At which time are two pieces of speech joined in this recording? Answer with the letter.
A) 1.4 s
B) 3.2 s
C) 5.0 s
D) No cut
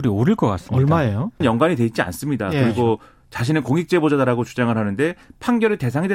A